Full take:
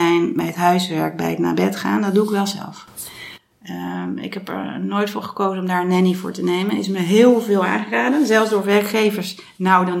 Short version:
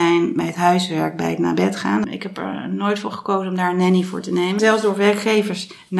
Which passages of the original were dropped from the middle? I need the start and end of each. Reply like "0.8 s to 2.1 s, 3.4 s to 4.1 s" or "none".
2.0 s to 4.2 s, 6.7 s to 8.3 s